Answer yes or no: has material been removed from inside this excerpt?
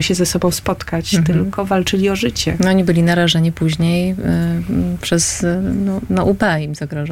no